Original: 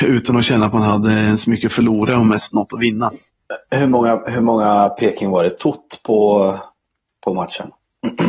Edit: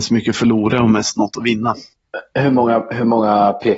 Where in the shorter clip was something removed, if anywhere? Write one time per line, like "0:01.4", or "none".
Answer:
none